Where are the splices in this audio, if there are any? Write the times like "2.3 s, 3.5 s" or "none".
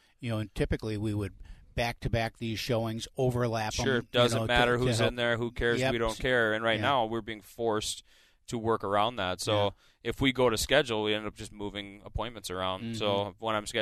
none